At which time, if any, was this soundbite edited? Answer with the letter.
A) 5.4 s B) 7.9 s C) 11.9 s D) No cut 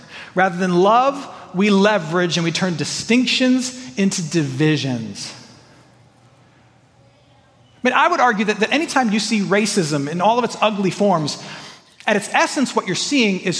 D